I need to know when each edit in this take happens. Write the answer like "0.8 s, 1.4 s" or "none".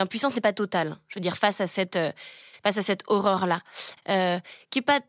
4.0 s